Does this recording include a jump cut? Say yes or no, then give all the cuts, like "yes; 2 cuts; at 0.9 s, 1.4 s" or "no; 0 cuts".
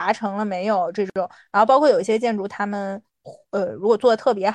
no; 0 cuts